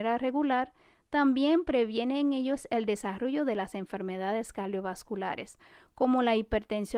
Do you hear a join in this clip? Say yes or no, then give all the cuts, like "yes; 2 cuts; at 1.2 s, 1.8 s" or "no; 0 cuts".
no; 0 cuts